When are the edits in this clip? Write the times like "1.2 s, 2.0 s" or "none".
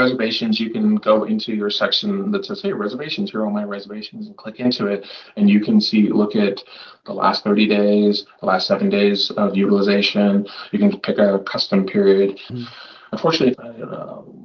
12.5 s, 13.5 s